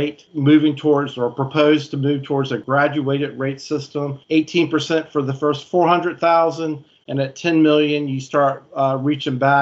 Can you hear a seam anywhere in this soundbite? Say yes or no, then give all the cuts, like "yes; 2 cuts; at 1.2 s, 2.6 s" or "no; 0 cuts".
yes; 1 cut; at 7.0 s